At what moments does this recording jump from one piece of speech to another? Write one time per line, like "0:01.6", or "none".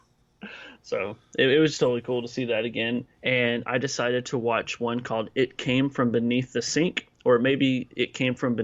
0:03.2